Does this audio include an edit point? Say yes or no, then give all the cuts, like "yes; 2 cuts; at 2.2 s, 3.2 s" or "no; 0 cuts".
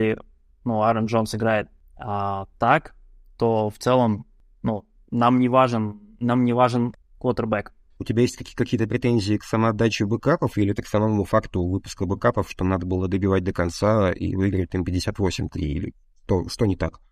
yes; 2 cuts; at 8.0 s, 10.8 s